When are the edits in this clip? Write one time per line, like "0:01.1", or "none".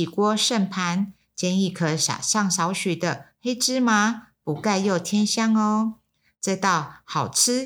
none